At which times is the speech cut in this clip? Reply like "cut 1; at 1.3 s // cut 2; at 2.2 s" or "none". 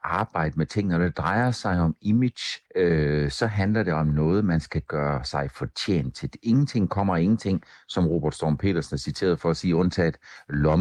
cut 1; at 2.7 s